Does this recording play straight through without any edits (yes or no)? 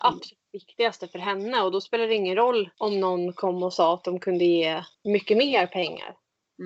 no